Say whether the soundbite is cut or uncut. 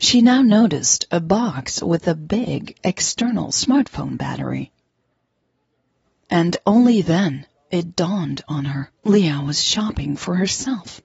cut